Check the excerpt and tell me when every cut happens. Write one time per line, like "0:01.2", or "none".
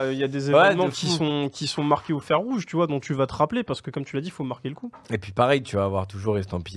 none

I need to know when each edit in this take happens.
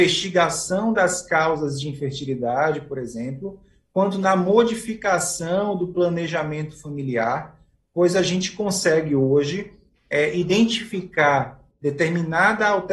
none

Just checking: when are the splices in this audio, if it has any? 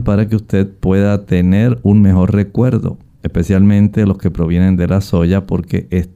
none

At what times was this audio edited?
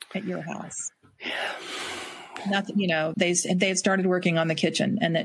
0:03.1

